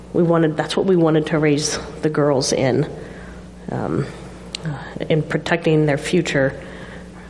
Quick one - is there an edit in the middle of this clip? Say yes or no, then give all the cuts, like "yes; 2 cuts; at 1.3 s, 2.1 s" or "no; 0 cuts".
yes; 1 cut; at 5.0 s